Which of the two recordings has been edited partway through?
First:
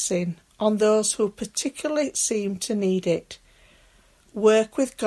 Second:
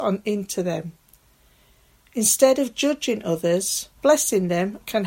second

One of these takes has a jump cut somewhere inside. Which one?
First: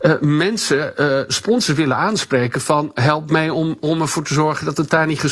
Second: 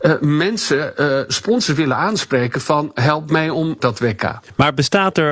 second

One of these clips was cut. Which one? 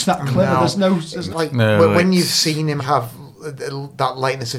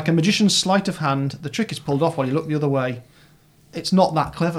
first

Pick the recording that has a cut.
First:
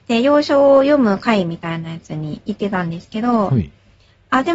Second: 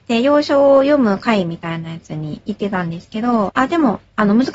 second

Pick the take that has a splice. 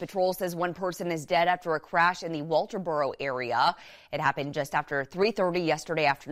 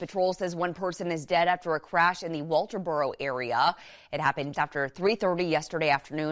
second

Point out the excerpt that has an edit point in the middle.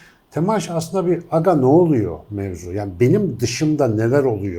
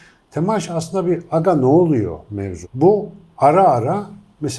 second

